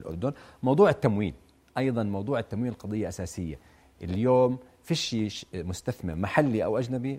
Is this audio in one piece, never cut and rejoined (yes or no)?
yes